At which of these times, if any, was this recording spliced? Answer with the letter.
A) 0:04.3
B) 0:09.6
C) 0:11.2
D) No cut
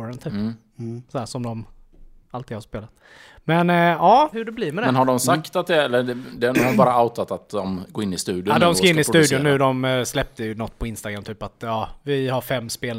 A